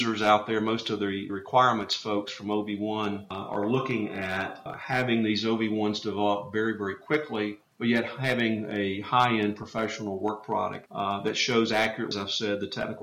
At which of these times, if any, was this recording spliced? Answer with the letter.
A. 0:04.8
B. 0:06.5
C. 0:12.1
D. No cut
D